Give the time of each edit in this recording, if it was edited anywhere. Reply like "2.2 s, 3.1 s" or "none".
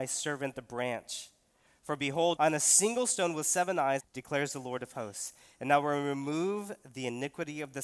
2.4 s, 4.0 s